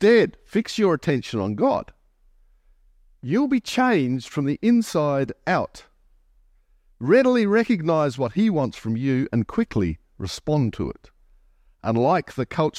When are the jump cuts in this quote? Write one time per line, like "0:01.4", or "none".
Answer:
none